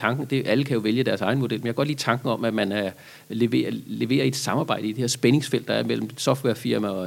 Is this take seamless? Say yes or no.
yes